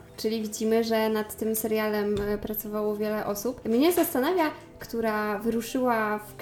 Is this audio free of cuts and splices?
no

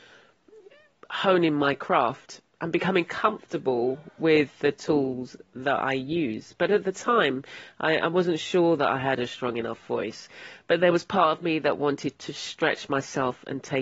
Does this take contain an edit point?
no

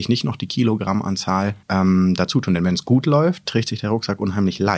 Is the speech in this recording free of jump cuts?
no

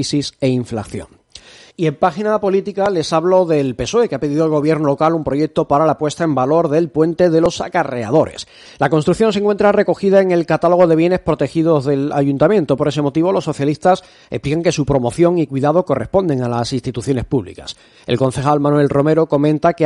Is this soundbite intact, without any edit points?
no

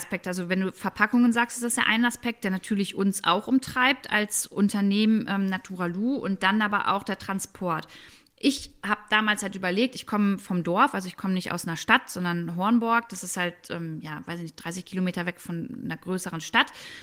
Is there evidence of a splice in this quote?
no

